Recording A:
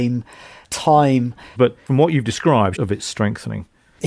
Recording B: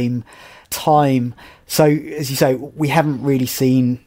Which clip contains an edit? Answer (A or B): A